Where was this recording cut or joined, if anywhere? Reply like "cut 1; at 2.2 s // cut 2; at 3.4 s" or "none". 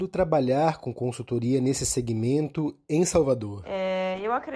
none